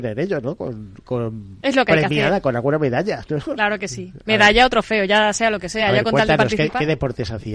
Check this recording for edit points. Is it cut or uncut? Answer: uncut